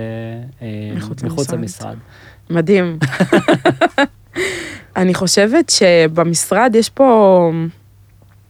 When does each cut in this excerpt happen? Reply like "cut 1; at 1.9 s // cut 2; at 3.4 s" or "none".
cut 1; at 2.4 s // cut 2; at 4.9 s